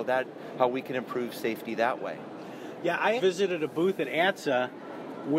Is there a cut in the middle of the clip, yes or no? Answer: yes